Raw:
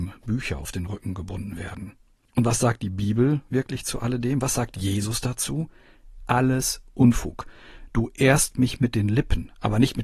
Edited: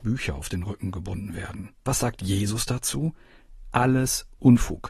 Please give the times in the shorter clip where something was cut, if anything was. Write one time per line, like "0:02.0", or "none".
0:01.9